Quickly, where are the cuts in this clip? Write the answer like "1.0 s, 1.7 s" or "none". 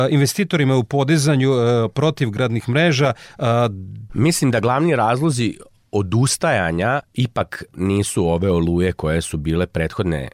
4.1 s, 7.0 s